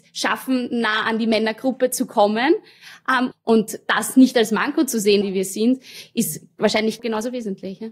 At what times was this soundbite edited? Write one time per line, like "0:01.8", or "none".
0:03.3
0:05.2
0:07.0

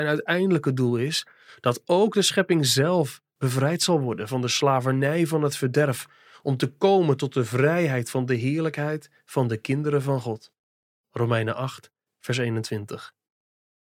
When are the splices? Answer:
none

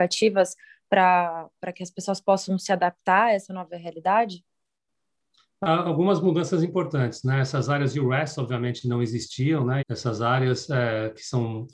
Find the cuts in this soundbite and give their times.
none

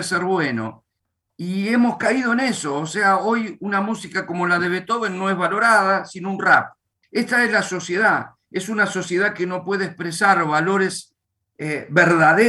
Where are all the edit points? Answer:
0:07.0

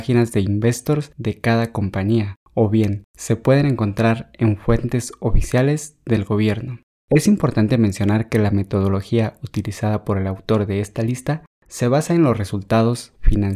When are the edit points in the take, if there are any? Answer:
0:06.9

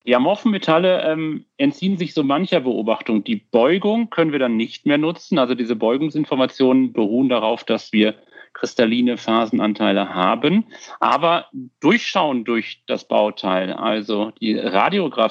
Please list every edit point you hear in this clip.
none

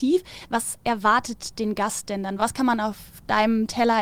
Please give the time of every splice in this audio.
none

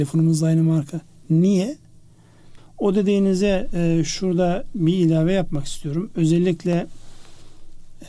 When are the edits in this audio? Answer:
0:02.6

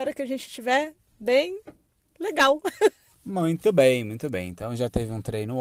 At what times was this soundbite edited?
0:03.1

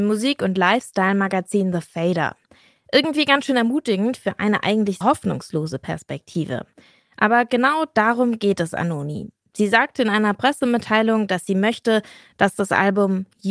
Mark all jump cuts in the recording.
0:05.0

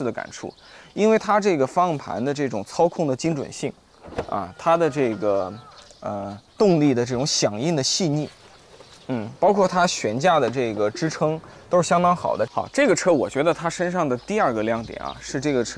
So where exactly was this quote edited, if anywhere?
0:06.5
0:12.5

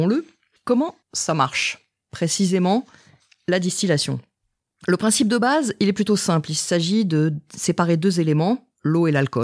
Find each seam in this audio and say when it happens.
none

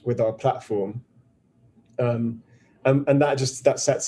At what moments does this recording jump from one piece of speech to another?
none

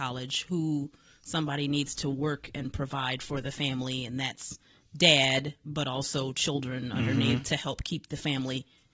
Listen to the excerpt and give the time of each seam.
0:04.8

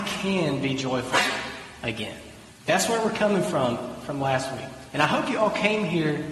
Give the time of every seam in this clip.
0:02.5

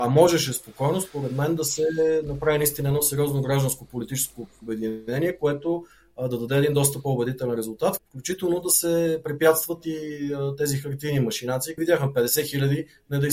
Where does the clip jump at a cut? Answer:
0:08.0
0:11.8

